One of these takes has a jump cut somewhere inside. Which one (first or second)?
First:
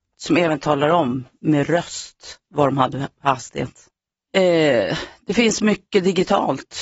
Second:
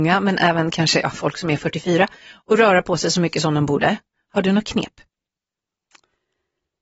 first